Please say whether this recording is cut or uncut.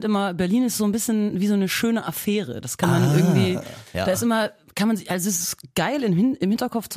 uncut